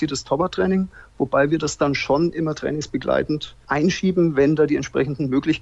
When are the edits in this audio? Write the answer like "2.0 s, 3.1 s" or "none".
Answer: none